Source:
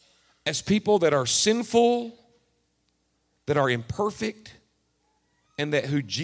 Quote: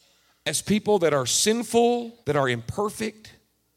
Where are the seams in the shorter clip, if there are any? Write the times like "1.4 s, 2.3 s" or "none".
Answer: 2.2 s